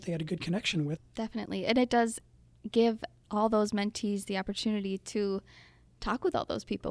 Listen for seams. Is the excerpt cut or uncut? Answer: cut